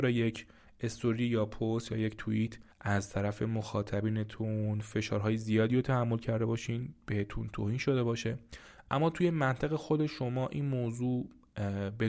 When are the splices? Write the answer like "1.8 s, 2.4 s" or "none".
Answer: 2.7 s